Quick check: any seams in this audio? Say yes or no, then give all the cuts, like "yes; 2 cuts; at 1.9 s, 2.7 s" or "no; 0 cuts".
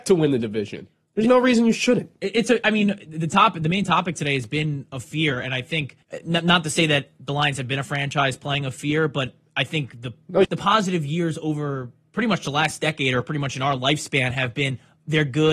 yes; 2 cuts; at 6.0 s, 10.4 s